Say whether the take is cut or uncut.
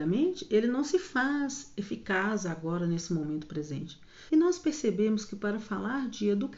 cut